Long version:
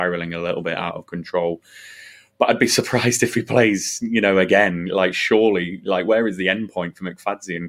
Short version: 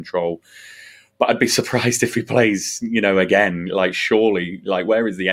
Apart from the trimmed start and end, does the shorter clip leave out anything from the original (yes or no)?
no